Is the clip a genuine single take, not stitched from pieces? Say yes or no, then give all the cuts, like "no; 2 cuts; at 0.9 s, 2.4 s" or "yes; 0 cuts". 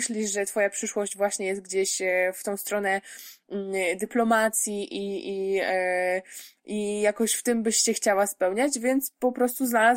yes; 0 cuts